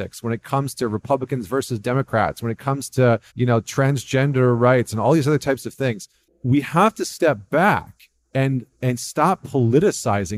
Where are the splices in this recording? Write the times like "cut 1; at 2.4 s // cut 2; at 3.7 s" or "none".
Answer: cut 1; at 3.3 s

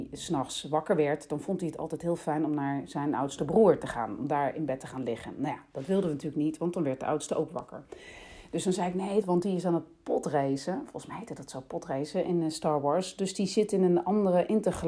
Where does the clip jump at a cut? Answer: cut 1; at 9.2 s

